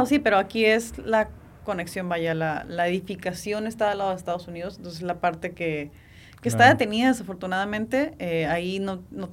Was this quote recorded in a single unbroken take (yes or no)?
yes